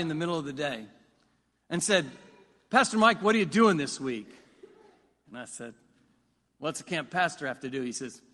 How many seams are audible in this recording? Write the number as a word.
one